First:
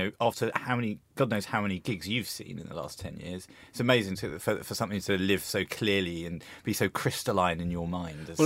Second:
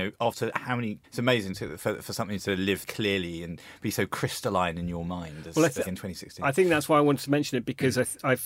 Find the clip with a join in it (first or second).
second